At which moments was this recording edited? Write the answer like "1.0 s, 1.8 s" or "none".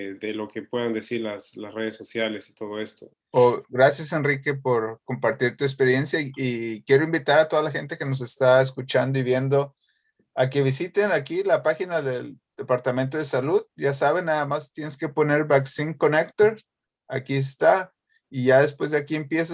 3.1 s